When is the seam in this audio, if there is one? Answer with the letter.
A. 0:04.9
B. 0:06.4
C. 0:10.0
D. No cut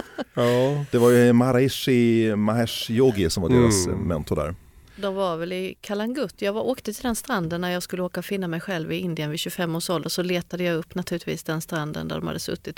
D